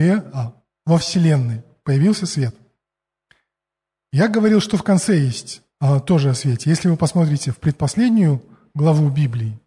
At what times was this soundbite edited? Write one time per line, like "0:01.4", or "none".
none

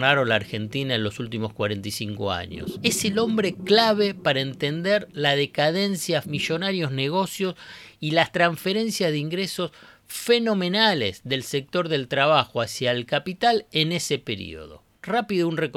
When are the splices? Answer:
0:06.2

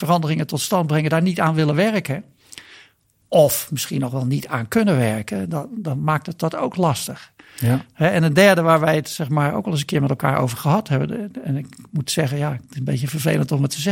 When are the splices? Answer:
none

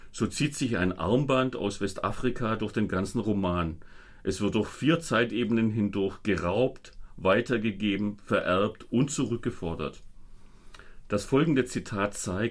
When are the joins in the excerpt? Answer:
none

